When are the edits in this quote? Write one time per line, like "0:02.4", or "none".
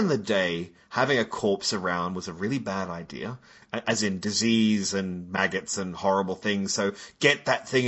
none